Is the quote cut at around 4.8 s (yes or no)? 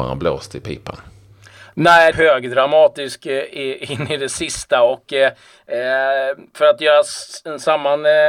no